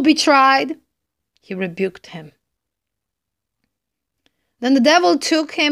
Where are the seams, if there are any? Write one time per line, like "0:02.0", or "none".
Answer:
0:01.2